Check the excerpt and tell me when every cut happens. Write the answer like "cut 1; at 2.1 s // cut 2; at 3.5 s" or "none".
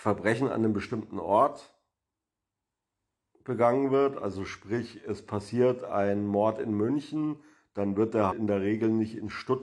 cut 1; at 8.3 s